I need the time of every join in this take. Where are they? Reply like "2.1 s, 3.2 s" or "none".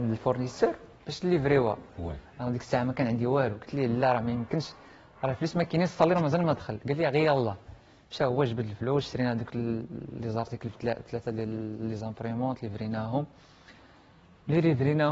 none

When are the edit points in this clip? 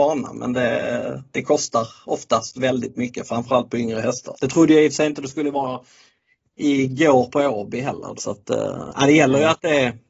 4.4 s, 8.2 s

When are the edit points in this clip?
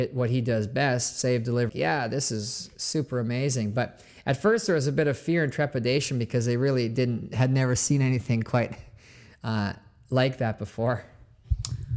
1.7 s

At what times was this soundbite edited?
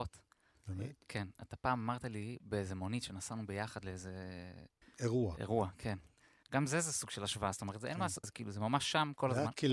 4.8 s, 6.4 s, 8.2 s

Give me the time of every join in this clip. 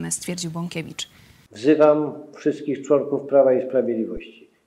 1.5 s

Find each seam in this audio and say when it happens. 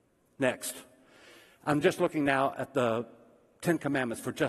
none

